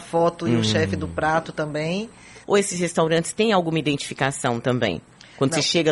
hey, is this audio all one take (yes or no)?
no